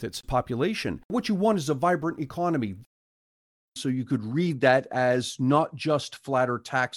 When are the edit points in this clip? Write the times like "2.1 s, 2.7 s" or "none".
3.8 s